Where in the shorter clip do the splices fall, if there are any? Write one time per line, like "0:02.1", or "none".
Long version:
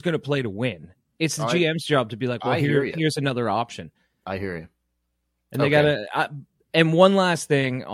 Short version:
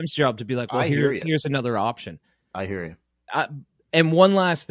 0:03.3